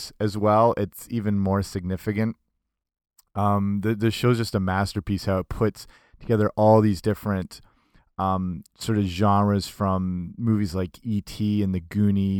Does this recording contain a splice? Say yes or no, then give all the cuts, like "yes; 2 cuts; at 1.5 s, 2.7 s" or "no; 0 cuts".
no; 0 cuts